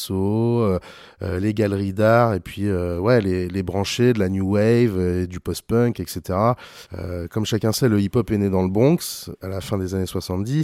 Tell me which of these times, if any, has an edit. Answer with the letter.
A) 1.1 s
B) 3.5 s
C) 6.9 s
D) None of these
C